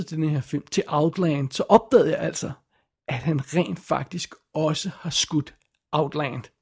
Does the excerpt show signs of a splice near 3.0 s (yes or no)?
no